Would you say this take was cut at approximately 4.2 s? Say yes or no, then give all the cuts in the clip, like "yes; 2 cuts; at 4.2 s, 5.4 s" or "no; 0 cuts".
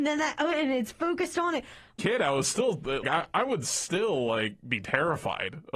no; 2 cuts; at 2.0 s, 3.0 s